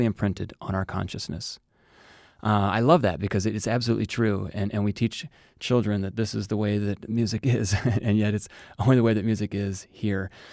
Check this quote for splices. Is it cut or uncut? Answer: uncut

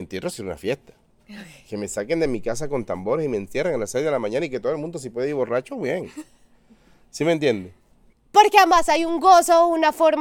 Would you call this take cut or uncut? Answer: cut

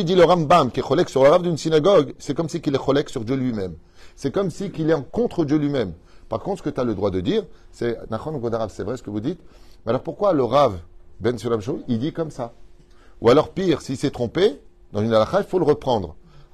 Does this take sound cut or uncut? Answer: uncut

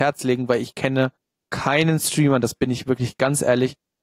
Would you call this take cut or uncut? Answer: uncut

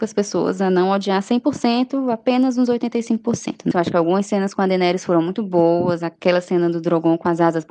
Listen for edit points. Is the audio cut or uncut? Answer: cut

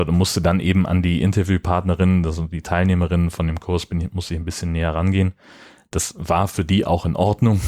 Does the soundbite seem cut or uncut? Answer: uncut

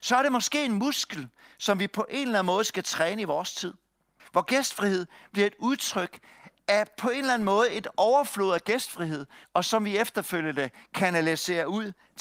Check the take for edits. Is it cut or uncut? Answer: cut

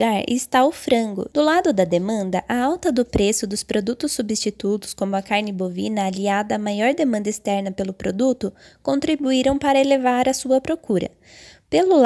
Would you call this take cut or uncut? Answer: cut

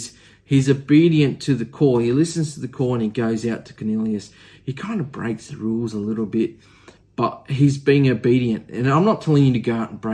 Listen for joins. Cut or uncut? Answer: uncut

